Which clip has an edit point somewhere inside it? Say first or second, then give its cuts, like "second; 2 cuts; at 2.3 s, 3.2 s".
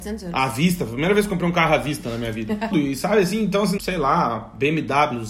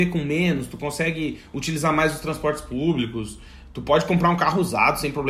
first; 2 cuts; at 2.7 s, 3.8 s